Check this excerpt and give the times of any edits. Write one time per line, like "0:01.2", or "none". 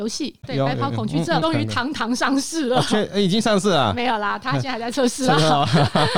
none